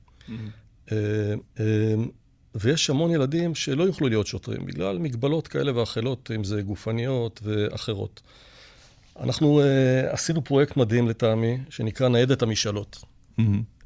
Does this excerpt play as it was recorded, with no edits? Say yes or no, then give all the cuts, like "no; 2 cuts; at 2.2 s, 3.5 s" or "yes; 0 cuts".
no; 1 cut; at 1.4 s